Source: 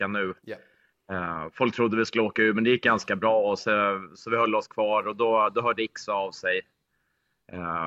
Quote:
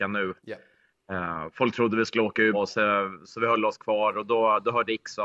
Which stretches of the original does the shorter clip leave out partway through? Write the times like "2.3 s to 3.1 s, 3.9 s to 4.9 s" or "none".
2.5 s to 3.4 s